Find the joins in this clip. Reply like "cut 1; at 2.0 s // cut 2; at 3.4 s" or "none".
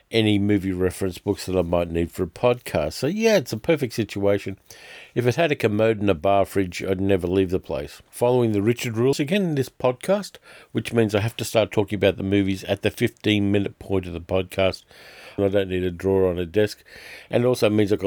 cut 1; at 9.1 s // cut 2; at 15.4 s